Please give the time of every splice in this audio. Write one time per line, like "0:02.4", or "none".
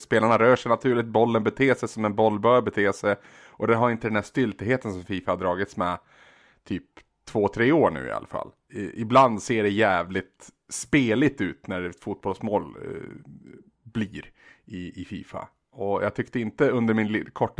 none